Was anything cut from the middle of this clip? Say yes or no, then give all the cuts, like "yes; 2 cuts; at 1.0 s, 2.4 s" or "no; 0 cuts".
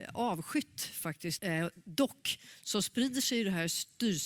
yes; 1 cut; at 1.4 s